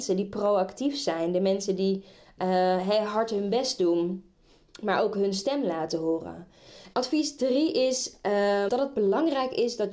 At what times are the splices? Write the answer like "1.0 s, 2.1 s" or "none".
6.9 s, 8.7 s